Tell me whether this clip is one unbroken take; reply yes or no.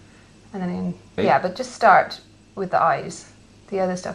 no